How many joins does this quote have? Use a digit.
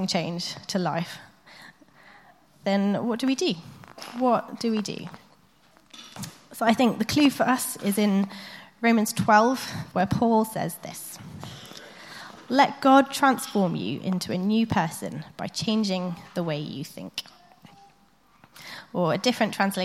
1